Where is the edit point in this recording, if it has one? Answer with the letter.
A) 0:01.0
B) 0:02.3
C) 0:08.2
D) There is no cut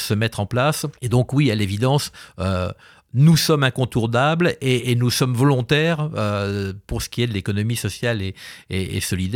A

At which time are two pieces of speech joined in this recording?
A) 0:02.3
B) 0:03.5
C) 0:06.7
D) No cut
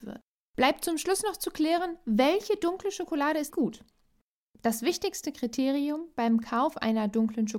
B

